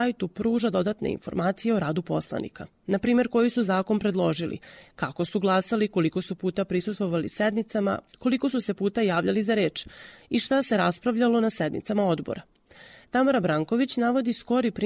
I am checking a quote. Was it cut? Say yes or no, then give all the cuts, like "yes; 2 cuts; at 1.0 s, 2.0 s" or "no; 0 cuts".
no; 0 cuts